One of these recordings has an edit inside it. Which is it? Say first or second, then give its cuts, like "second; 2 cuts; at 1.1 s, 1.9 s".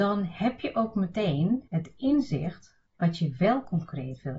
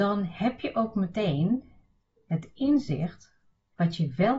first; 2 cuts; at 1.7 s, 2.9 s